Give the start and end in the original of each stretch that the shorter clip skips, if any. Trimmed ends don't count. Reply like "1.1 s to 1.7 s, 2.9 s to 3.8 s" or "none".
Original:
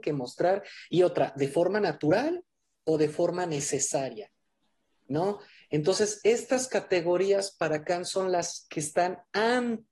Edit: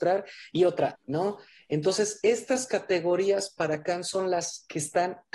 1.3 s to 5.0 s